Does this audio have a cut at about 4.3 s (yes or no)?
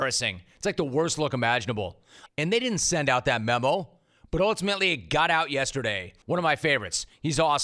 no